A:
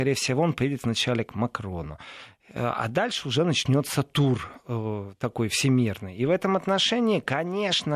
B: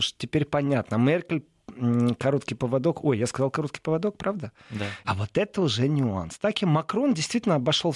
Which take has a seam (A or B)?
B